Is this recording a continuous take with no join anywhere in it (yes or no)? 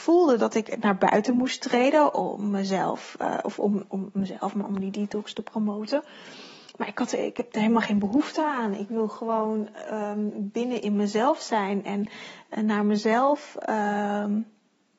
yes